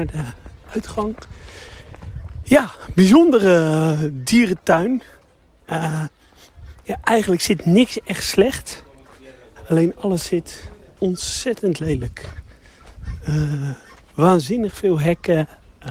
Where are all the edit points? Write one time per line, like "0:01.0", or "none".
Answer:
none